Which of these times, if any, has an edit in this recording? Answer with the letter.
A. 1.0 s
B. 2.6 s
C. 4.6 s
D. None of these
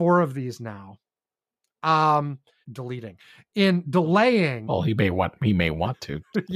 B